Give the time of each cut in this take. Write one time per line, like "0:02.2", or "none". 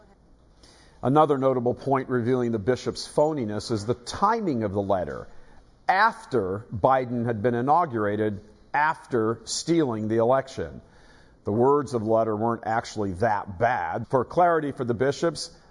0:14.0

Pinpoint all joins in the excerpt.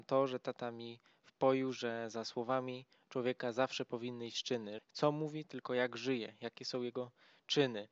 0:04.8

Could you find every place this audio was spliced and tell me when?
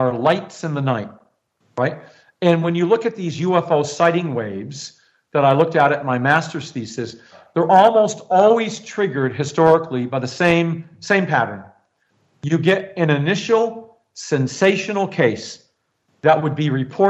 none

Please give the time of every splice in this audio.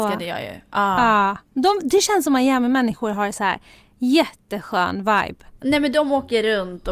0:05.5

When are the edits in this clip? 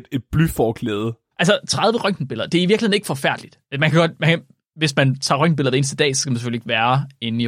0:01.3

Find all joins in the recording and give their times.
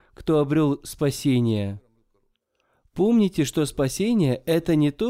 none

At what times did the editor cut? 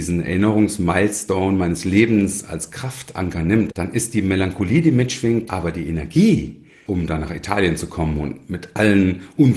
0:03.7
0:05.5
0:06.9

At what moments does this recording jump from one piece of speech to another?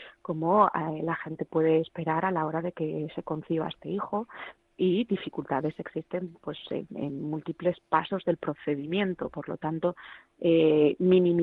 0:07.8

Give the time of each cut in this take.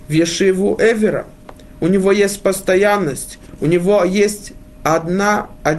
none

